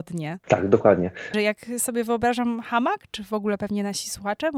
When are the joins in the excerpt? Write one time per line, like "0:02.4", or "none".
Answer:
0:01.3